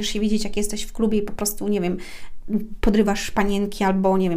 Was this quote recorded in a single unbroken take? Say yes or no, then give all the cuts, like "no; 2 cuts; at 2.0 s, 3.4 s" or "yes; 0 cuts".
yes; 0 cuts